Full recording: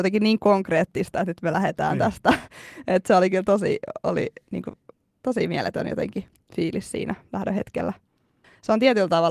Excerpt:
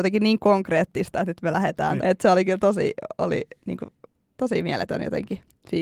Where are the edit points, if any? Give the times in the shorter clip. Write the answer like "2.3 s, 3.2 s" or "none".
2.0 s